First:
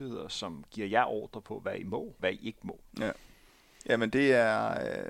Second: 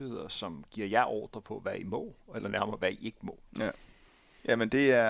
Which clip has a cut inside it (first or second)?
first